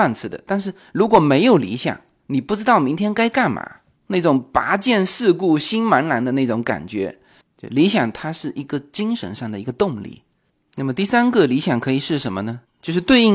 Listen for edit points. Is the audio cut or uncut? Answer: cut